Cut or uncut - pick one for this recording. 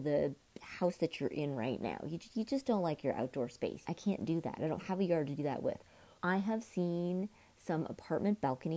cut